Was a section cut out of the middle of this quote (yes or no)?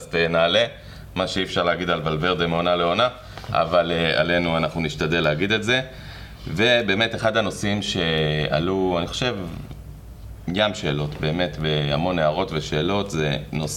no